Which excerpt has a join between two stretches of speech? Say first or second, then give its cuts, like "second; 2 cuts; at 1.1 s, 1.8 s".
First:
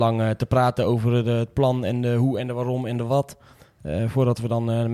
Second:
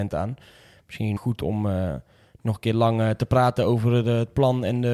second; 1 cut; at 1.2 s